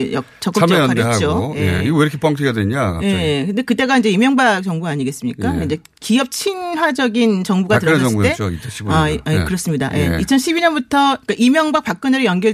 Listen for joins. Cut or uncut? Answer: uncut